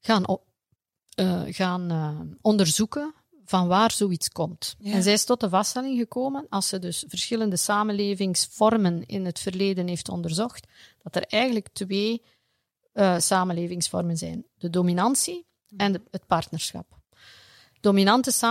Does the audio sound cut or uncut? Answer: uncut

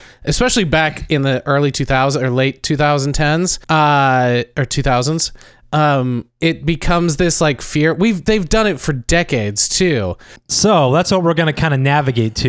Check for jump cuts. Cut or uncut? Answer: cut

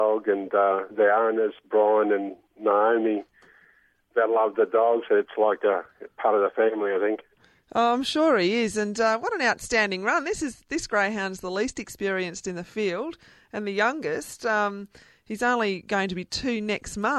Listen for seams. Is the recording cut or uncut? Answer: uncut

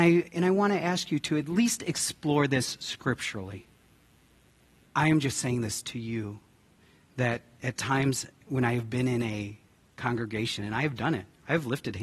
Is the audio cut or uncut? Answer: cut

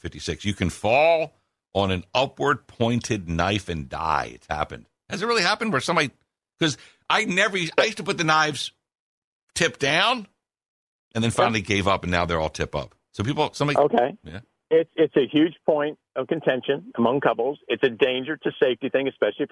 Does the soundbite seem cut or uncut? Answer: uncut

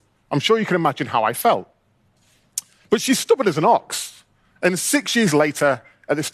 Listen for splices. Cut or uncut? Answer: uncut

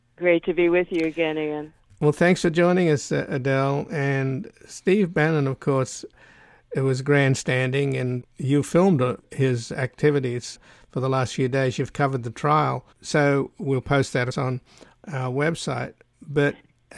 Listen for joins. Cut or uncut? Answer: cut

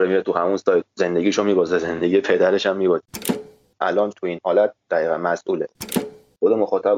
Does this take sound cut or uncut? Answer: uncut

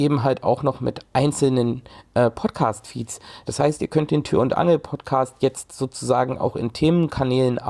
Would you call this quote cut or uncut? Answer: uncut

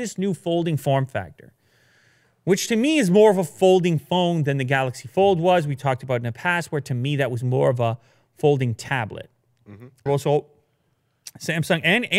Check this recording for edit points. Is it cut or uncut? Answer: cut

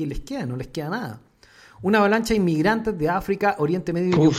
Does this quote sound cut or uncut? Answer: uncut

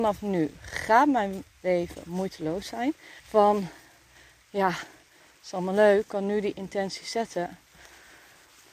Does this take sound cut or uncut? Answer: cut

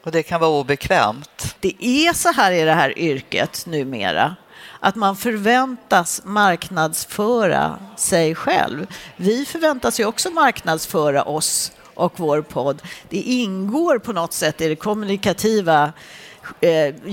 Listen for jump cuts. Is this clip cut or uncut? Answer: cut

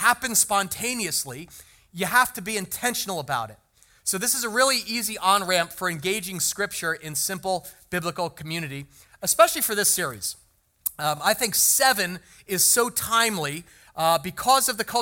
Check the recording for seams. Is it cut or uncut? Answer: uncut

